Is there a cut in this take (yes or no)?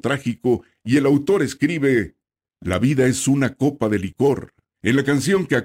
yes